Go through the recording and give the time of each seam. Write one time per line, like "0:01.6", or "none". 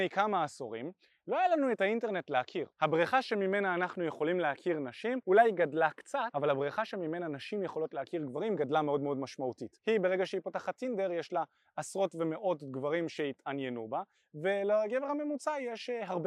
0:09.8